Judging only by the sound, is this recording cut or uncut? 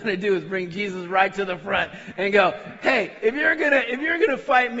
uncut